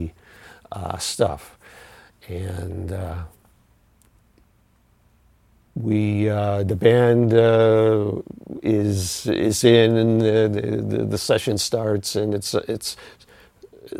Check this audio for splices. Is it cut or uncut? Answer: uncut